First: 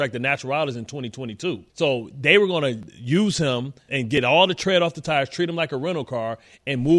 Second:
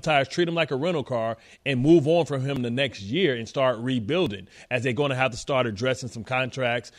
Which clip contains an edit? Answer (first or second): first